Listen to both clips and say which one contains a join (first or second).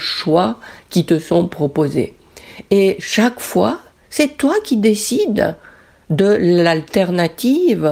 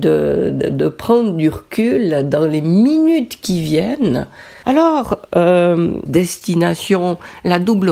second